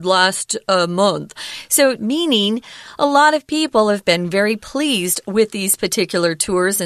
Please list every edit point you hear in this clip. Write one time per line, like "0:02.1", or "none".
0:02.0